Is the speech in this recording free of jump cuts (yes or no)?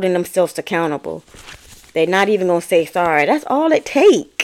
yes